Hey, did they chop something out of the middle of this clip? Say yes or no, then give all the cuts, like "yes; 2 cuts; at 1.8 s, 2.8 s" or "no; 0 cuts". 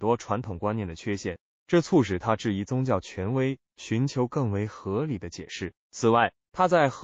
yes; 1 cut; at 5.8 s